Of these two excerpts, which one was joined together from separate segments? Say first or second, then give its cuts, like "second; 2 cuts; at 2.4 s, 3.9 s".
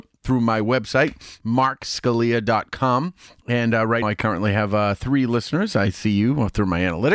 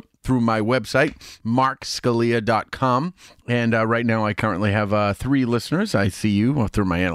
first; 1 cut; at 4.0 s